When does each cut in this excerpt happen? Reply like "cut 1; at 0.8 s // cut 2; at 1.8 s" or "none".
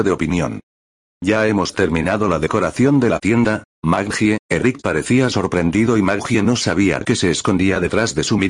cut 1; at 3.7 s